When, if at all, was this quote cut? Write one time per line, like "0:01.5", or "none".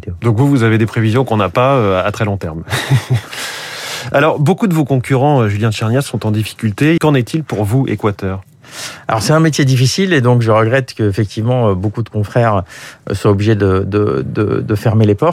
0:07.0